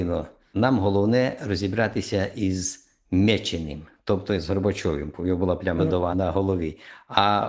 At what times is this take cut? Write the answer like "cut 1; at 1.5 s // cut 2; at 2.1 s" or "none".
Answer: cut 1; at 5.8 s